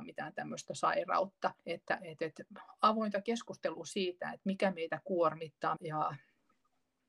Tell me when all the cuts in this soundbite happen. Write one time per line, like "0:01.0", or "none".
0:01.6
0:05.8